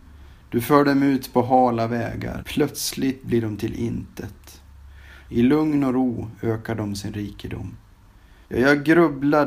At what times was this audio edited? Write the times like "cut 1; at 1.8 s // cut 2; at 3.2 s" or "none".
cut 1; at 2.4 s // cut 2; at 5.3 s // cut 3; at 8.5 s